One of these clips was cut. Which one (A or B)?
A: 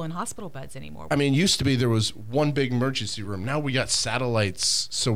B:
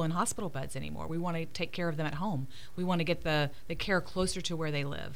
A